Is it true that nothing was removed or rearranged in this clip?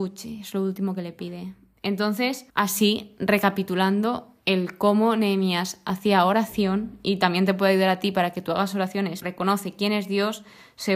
no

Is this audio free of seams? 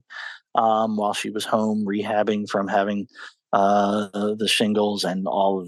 yes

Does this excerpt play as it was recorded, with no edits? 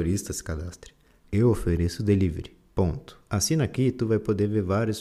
no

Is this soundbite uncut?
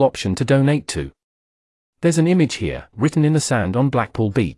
no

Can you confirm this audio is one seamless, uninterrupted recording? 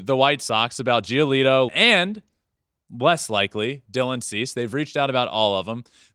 no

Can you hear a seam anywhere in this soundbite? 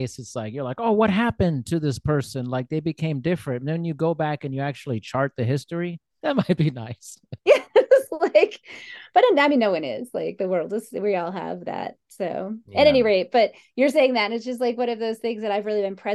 yes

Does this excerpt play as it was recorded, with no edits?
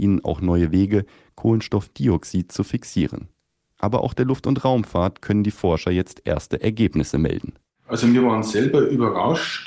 yes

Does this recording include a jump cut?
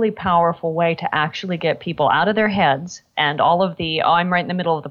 no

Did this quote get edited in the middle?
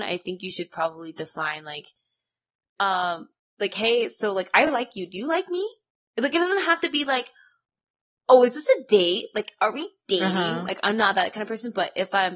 no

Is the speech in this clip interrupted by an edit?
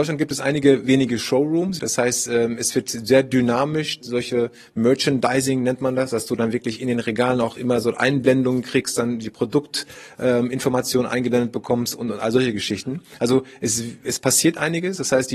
yes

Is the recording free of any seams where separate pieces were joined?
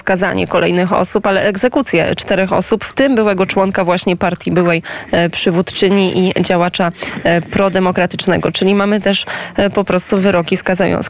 yes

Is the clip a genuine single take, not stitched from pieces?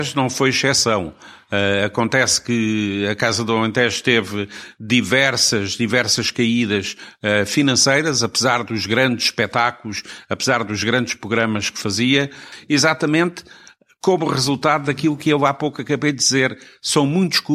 yes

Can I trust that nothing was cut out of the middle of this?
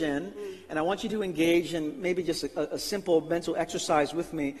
yes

